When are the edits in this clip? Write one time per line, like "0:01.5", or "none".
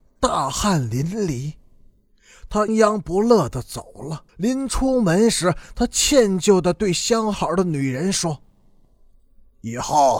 0:02.7
0:04.3